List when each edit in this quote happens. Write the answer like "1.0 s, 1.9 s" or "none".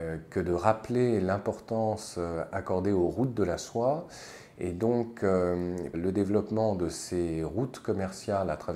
5.9 s